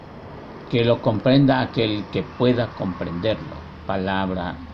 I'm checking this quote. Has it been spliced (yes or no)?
no